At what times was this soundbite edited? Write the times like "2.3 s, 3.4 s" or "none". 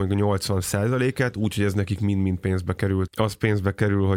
3.1 s